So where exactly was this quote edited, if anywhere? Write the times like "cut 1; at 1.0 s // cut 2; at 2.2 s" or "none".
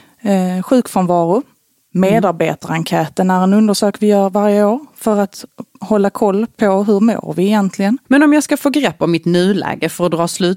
cut 1; at 8.1 s